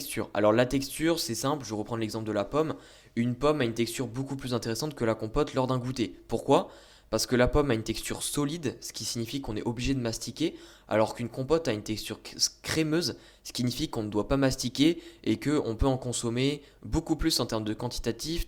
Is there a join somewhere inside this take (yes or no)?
no